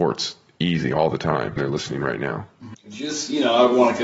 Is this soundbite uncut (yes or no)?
no